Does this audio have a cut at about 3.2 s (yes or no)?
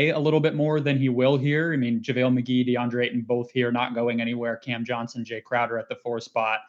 no